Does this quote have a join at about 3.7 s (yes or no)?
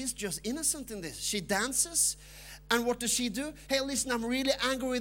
yes